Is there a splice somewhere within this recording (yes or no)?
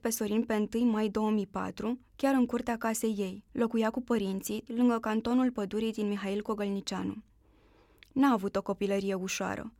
yes